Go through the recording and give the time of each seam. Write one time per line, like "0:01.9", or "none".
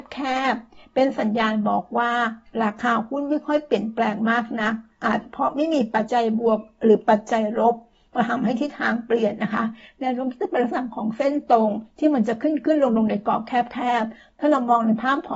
0:04.9
0:06.1